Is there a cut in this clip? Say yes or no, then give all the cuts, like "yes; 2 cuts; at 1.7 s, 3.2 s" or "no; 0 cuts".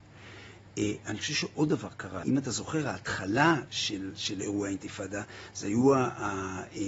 yes; 1 cut; at 2.2 s